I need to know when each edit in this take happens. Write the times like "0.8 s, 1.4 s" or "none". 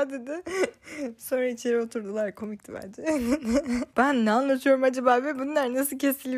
3.9 s